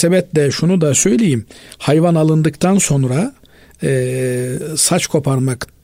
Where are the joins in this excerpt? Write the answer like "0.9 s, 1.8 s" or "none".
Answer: none